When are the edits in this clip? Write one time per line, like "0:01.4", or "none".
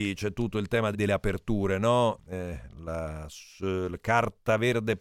0:00.9
0:02.2